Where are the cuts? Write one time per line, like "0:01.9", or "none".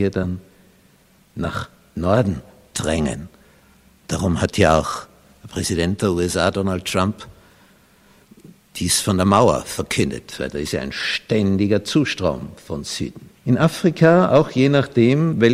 0:13.3

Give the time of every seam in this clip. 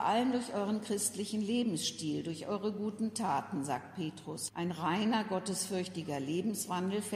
0:04.5

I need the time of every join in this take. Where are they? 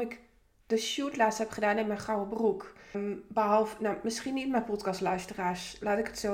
0:02.9

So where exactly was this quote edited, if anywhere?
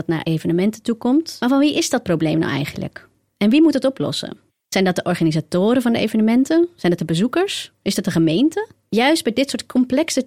none

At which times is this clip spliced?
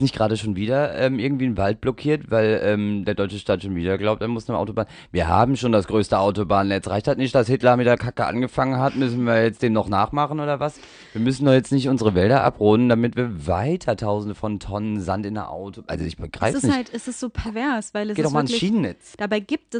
none

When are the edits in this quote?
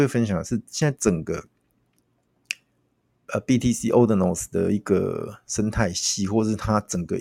none

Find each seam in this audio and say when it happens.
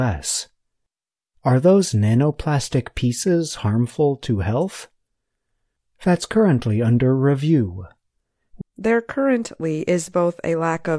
0:01.3
0:08.6

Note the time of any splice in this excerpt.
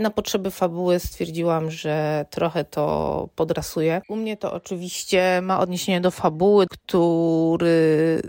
0:04.0
0:06.7

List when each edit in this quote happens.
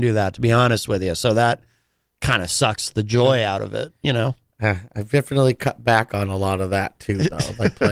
none

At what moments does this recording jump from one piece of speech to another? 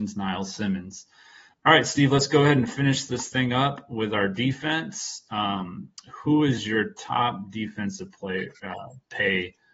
none

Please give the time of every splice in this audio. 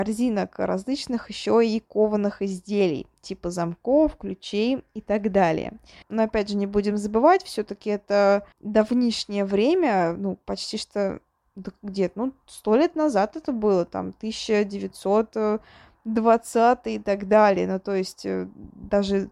0:06.0
0:08.5

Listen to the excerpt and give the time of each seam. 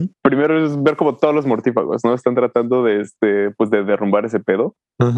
none

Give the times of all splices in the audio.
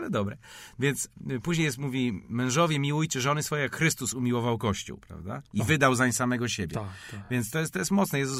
none

